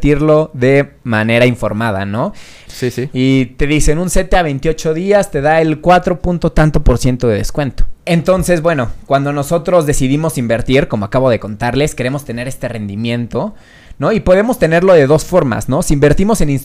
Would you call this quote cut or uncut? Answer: cut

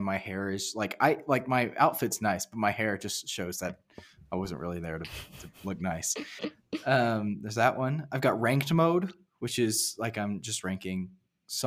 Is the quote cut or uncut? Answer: uncut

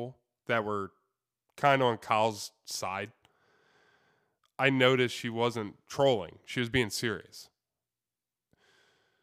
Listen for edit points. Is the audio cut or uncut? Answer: uncut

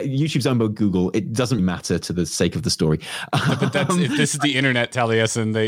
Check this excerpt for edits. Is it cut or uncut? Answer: cut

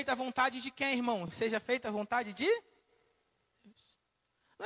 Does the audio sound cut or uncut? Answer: uncut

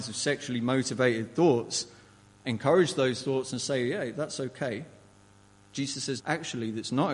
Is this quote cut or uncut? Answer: cut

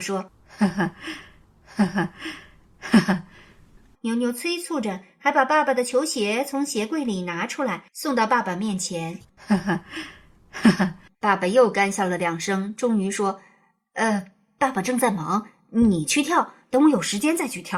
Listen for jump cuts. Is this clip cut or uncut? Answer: uncut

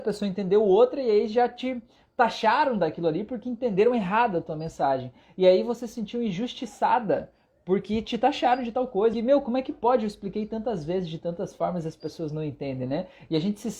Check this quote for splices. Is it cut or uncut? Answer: cut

